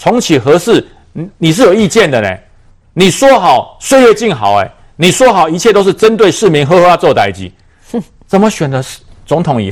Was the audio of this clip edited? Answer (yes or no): no